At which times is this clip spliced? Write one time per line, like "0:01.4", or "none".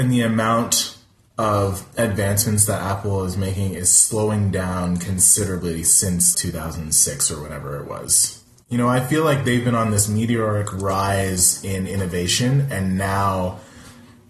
0:06.3